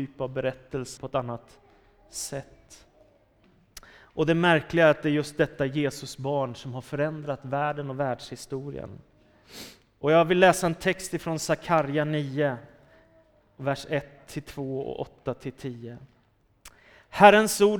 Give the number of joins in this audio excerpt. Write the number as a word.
one